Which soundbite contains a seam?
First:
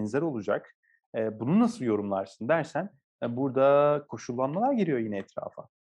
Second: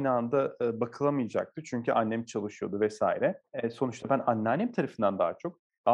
second; 1 cut; at 3.5 s

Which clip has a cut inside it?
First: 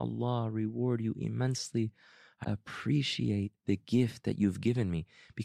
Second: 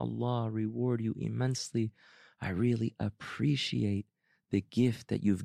first; 2 cuts; at 2.4 s, 3.6 s

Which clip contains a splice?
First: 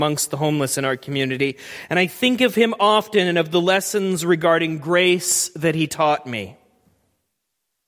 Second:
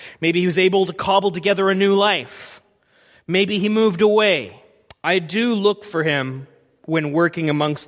second; 1 cut; at 4.9 s

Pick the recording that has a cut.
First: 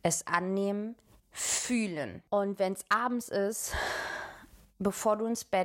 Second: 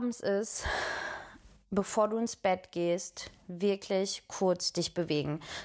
first; 1 cut; at 1.2 s

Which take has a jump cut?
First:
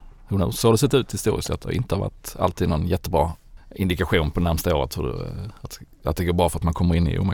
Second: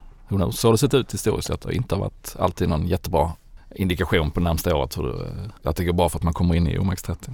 second; 1 cut; at 5.6 s

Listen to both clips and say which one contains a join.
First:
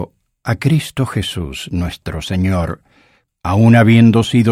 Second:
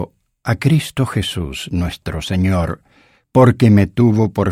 first; 1 cut; at 3.3 s

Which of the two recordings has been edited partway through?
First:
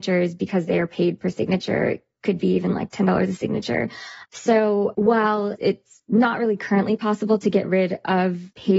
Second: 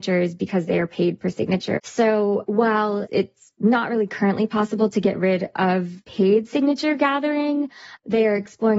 second; 1 cut; at 1.8 s

